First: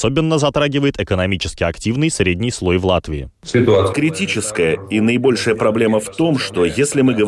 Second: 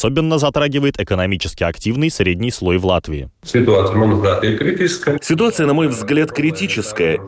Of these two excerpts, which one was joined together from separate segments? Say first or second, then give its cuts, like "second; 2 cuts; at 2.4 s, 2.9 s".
first; 1 cut; at 3.9 s